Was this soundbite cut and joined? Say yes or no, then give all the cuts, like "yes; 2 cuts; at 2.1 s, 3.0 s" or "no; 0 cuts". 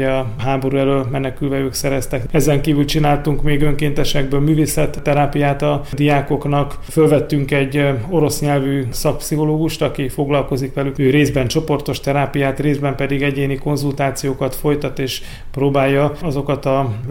yes; 1 cut; at 6.9 s